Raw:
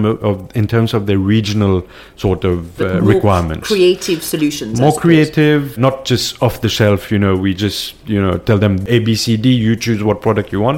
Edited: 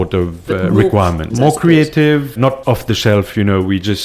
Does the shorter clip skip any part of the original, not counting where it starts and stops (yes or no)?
yes